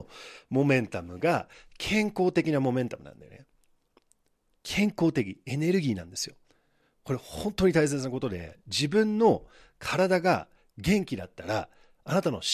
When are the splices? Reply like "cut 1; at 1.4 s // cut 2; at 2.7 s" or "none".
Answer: none